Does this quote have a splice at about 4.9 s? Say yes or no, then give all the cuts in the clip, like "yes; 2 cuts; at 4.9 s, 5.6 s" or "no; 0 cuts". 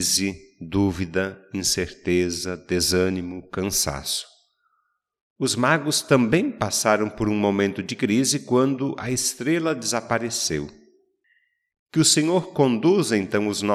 no; 1 cut; at 11.7 s